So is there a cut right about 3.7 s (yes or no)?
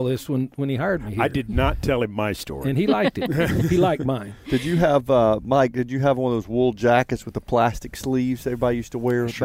no